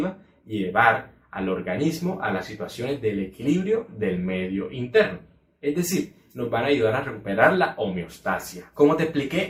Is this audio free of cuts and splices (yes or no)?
yes